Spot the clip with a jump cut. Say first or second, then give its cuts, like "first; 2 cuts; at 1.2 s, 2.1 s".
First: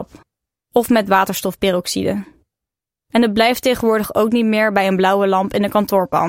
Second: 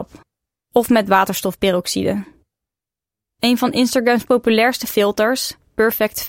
first; 1 cut; at 3.0 s